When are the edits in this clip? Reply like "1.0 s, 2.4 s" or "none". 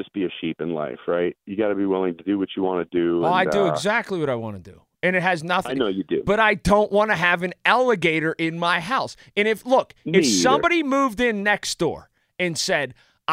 none